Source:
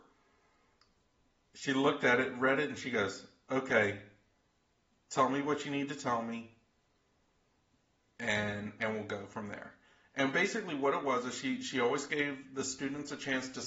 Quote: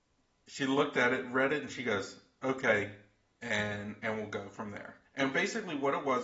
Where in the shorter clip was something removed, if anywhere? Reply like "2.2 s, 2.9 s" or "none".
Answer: 3.3 s, 5.1 s

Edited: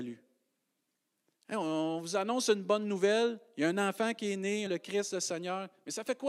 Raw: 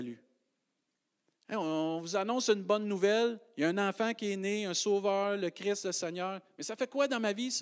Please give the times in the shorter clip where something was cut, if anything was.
4.7 s

